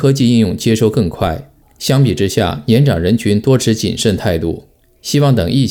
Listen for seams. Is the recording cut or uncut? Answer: uncut